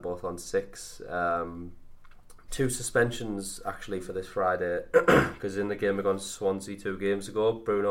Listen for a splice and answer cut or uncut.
cut